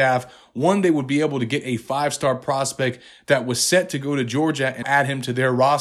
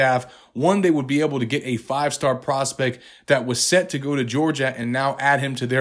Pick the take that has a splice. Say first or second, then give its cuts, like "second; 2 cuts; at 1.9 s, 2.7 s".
first; 1 cut; at 4.8 s